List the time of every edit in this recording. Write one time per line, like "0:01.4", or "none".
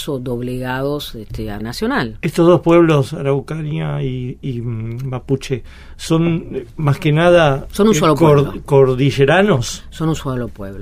0:01.6